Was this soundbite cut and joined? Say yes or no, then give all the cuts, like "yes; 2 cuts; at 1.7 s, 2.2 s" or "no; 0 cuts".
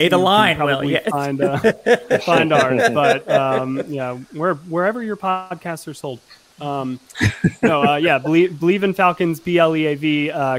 no; 0 cuts